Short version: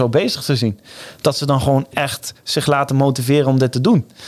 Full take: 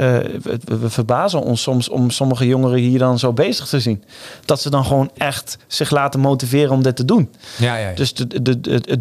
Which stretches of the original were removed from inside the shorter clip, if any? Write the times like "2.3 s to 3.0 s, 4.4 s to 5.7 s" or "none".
none